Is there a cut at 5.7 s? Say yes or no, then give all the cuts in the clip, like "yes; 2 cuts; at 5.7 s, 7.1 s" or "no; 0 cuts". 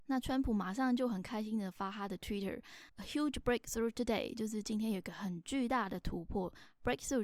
no; 1 cut; at 2.9 s